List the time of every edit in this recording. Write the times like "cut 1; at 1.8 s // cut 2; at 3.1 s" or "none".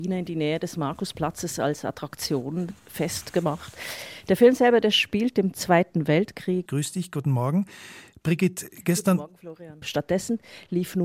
cut 1; at 6.7 s // cut 2; at 9.8 s